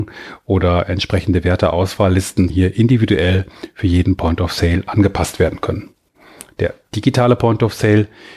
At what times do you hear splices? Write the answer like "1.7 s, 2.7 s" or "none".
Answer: 2.5 s